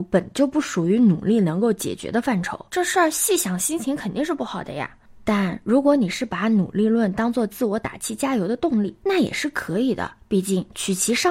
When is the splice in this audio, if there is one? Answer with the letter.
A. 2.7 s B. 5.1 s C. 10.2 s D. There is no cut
A